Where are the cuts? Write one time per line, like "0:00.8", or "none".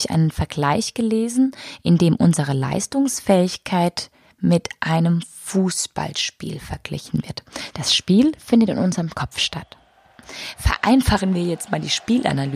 0:07.7